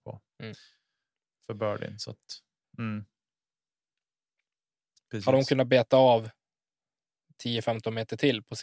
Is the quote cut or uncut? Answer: cut